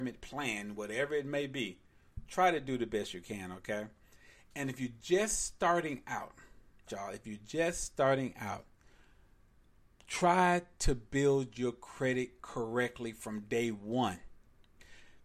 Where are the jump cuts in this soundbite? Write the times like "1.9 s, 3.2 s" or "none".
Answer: 6.9 s